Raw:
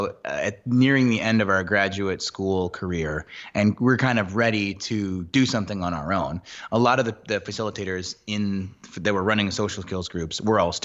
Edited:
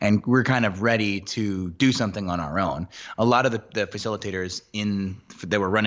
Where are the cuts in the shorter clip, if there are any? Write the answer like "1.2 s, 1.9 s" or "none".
none